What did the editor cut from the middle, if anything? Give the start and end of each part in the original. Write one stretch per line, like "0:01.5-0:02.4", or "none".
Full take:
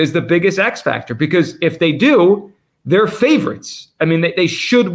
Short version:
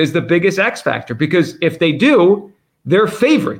none

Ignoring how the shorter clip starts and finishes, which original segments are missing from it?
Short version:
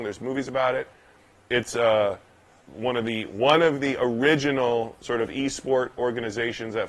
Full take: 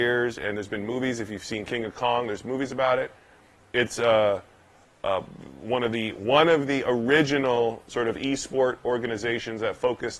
0:04.9-0:05.5

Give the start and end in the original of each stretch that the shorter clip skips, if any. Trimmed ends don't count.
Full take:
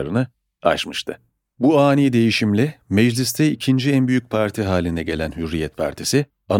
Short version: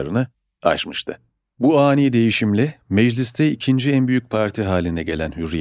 none

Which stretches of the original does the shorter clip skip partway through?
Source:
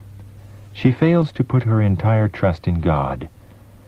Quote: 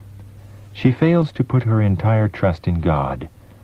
none

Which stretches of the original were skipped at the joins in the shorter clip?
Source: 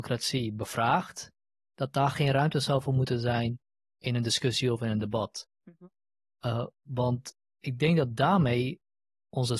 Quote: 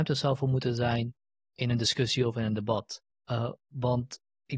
0:05.6-0:06.2

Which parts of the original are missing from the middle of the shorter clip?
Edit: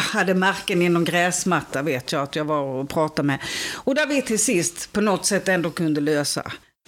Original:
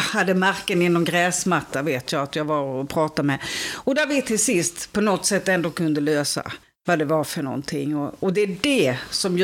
none

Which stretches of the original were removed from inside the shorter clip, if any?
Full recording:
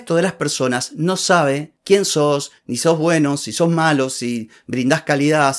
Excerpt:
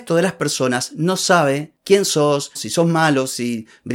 0:02.6-0:03.4

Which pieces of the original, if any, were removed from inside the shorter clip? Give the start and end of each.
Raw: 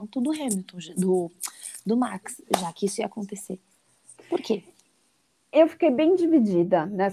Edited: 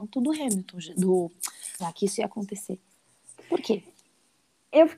0:01.8-0:02.6

